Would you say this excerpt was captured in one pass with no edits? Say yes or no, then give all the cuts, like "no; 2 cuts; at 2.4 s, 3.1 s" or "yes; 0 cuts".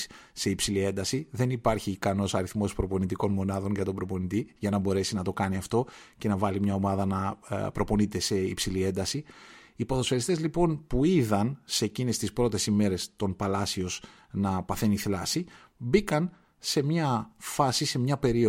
yes; 0 cuts